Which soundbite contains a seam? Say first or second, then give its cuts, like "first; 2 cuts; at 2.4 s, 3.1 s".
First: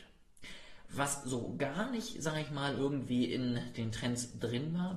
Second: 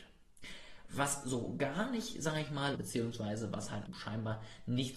second; 2 cuts; at 2.7 s, 3.9 s